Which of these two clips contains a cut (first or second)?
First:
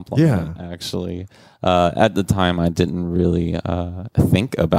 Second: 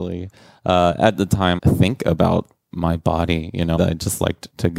second